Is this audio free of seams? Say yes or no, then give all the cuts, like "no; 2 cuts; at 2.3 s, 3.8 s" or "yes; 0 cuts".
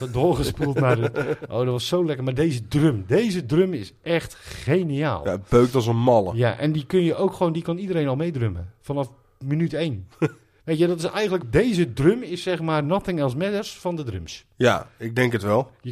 no; 1 cut; at 11.4 s